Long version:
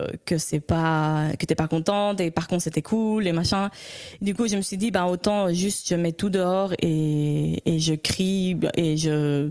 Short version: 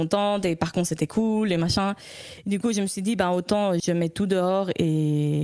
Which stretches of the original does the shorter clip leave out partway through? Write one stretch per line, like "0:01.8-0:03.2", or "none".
0:05.5-0:05.8